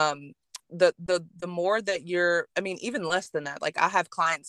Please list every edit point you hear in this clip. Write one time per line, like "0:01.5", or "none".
none